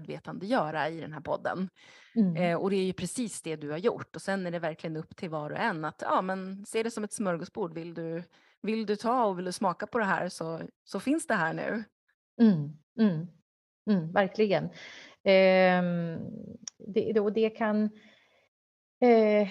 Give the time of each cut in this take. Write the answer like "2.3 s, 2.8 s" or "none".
none